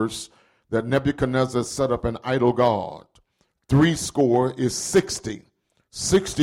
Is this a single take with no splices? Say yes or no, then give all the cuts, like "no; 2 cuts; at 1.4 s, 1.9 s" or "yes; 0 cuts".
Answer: yes; 0 cuts